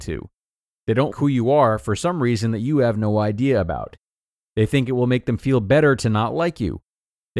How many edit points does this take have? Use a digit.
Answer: 1